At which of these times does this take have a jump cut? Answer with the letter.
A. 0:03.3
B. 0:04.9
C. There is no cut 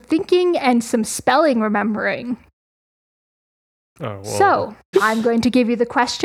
B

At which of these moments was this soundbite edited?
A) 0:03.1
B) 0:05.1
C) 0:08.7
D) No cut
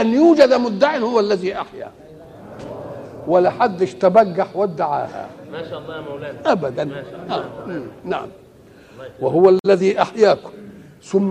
D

